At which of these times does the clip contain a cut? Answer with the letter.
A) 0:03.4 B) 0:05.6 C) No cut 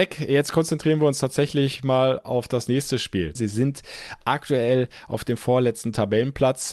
A